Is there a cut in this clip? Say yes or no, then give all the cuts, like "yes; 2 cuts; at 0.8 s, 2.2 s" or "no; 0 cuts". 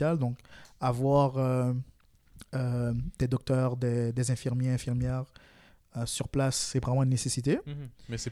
no; 0 cuts